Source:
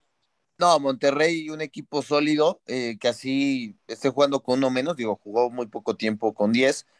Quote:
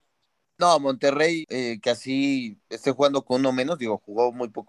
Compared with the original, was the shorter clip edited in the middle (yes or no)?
yes